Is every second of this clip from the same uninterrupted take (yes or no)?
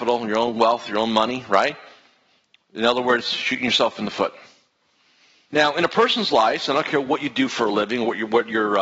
no